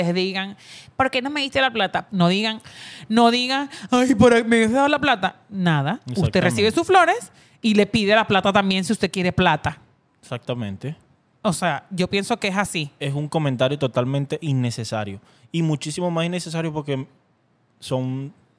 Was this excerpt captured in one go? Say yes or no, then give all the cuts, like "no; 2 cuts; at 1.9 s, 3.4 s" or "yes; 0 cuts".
no; 1 cut; at 2.1 s